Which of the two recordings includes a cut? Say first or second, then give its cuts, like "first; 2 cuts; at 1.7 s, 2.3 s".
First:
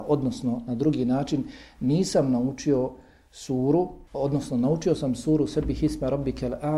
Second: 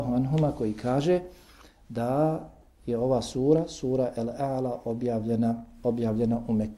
first; 1 cut; at 4.1 s